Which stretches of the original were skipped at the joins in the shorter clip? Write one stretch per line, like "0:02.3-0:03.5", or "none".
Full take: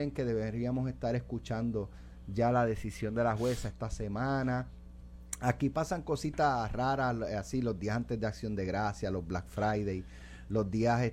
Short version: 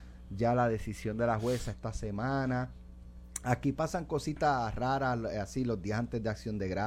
none